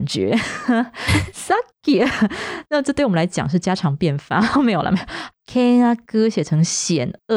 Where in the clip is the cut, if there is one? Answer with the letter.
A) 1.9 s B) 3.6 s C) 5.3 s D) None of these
C